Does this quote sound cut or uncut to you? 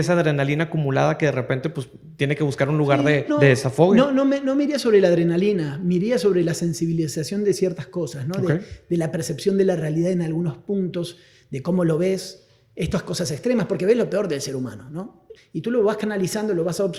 cut